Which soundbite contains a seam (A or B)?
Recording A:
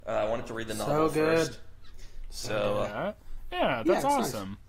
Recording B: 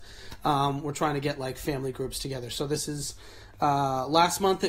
A